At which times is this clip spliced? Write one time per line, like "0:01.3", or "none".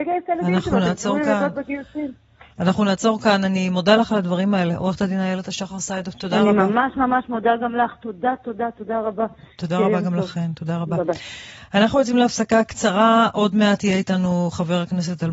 none